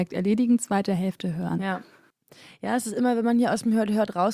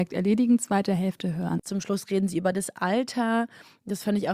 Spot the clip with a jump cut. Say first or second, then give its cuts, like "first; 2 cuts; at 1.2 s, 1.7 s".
second; 1 cut; at 1.6 s